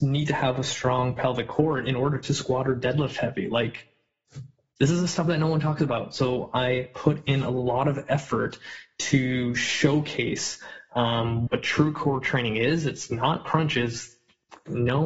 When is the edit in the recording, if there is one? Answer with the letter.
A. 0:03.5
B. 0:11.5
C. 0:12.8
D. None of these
B